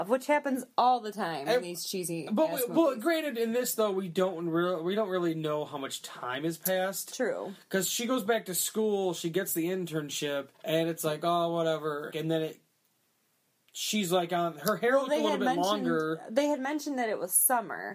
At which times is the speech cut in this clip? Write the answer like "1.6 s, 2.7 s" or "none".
10.5 s, 12.1 s